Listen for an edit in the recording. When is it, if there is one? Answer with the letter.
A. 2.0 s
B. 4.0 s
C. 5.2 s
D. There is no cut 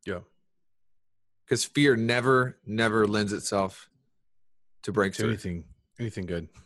D